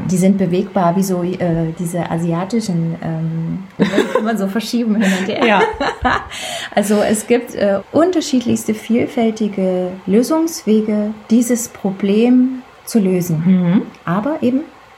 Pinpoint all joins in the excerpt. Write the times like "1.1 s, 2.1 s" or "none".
3.8 s, 7.8 s